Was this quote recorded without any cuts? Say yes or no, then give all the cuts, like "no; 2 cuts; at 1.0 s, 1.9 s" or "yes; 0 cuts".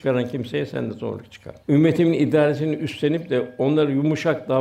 no; 1 cut; at 1.6 s